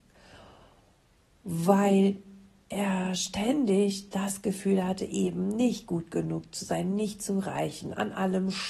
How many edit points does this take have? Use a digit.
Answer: 0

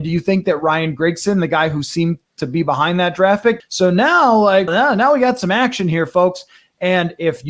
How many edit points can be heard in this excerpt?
2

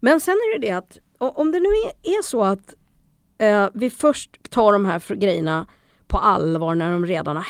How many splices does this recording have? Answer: 1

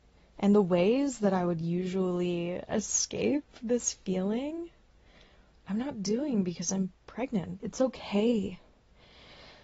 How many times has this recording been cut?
1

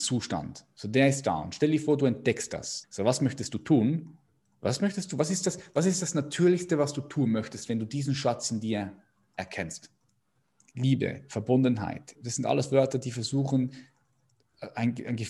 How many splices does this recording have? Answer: 3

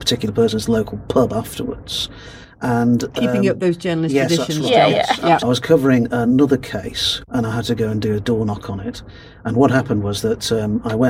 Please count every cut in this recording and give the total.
1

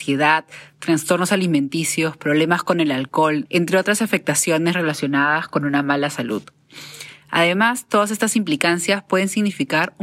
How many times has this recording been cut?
1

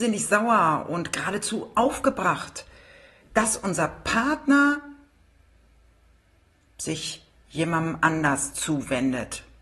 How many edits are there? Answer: 0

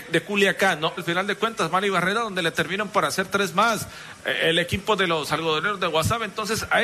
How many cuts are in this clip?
1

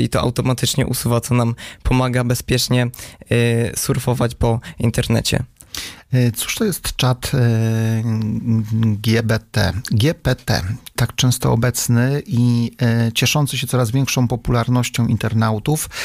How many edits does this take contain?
1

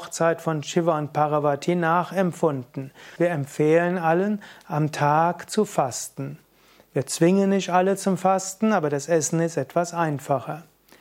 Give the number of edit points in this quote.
1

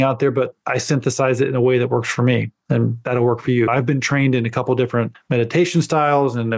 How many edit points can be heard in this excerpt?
1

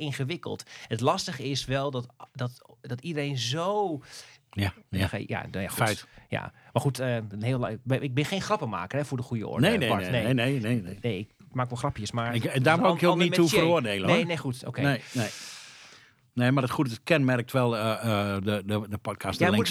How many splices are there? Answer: 1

